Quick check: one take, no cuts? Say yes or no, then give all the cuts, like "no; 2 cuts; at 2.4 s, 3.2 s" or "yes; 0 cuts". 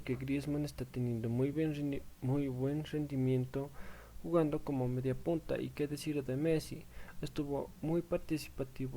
yes; 0 cuts